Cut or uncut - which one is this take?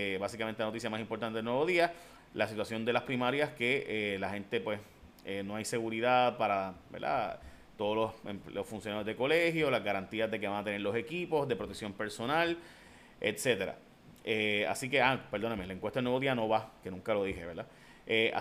uncut